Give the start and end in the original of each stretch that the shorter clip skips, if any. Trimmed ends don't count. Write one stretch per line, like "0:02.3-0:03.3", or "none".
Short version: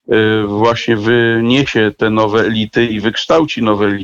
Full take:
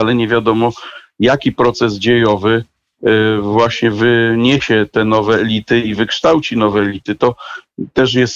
none